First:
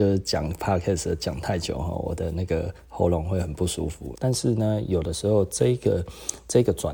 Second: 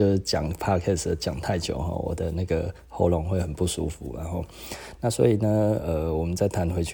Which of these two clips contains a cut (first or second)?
first